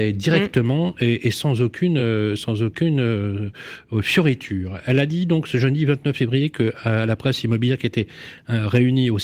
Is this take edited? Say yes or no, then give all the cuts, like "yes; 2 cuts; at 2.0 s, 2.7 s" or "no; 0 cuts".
no; 0 cuts